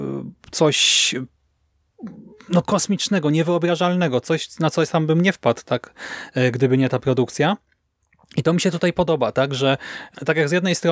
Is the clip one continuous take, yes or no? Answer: yes